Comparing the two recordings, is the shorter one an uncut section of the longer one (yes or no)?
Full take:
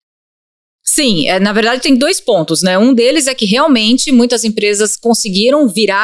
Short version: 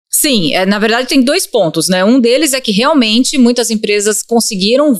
yes